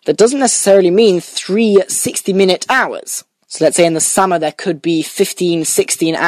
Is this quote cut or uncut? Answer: cut